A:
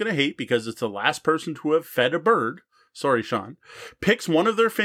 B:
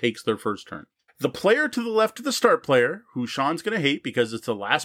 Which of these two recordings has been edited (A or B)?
B